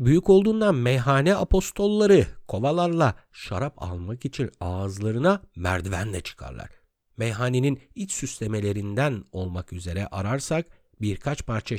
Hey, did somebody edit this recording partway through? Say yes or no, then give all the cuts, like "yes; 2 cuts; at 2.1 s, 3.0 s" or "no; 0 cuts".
no; 0 cuts